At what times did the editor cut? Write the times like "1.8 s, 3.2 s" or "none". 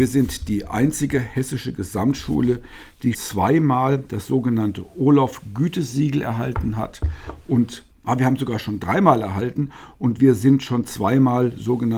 3.1 s, 7.9 s